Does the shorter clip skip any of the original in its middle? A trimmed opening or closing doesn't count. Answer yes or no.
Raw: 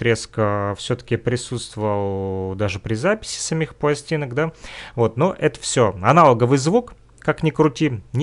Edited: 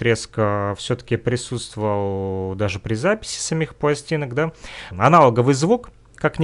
yes